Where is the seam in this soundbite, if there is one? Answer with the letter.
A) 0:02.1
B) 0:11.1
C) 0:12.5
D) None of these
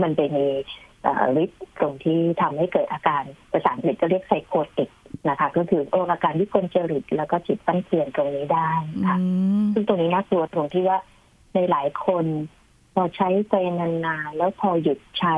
D